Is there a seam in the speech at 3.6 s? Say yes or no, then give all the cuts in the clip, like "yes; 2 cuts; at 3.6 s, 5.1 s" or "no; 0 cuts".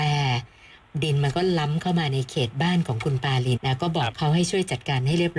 yes; 1 cut; at 3.6 s